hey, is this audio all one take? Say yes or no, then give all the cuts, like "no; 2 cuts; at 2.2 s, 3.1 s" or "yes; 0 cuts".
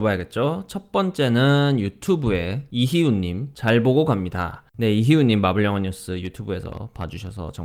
no; 1 cut; at 4.7 s